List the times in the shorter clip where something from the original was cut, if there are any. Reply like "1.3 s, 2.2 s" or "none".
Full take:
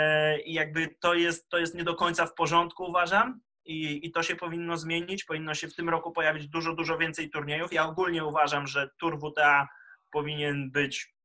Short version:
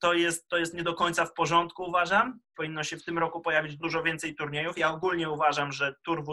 2.5 s, 3.8 s